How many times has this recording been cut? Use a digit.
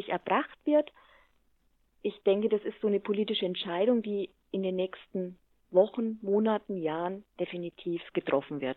0